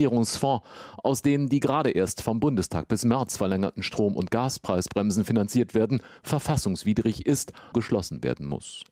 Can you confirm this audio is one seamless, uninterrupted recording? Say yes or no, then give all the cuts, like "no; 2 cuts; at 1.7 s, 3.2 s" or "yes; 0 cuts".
no; 1 cut; at 7.7 s